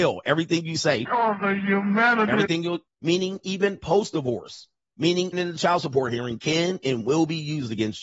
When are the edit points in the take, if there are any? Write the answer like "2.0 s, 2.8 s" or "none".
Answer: 2.9 s, 5.3 s